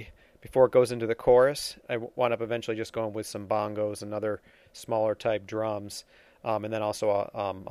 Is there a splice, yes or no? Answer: yes